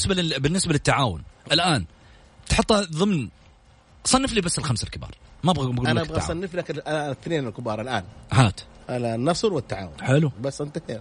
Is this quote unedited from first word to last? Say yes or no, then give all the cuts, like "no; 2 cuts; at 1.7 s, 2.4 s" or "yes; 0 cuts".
yes; 0 cuts